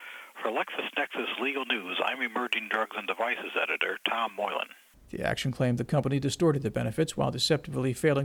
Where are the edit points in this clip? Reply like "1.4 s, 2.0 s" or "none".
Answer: 4.9 s

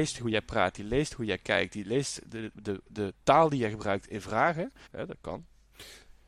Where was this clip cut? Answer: 4.9 s

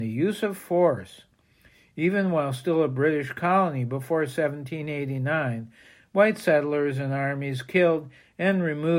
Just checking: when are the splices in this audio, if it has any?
none

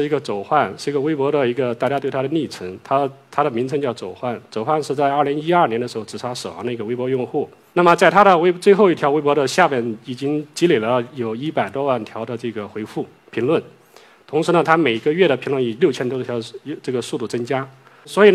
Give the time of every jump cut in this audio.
none

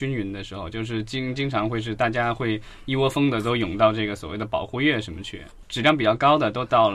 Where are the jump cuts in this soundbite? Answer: none

